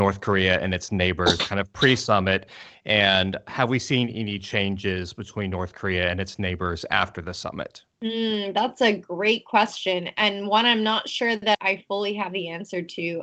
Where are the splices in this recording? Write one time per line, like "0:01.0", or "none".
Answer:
0:07.9
0:11.5

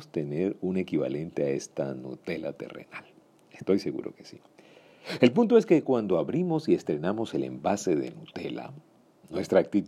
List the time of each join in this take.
none

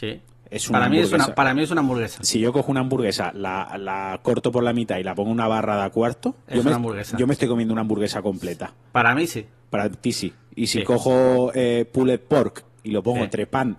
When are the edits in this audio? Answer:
0:06.4

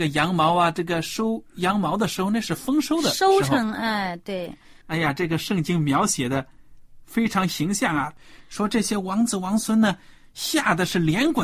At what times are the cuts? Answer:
0:04.8

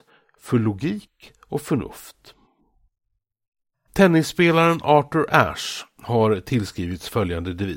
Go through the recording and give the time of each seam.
none

